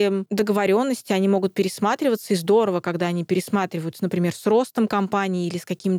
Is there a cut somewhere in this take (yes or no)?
no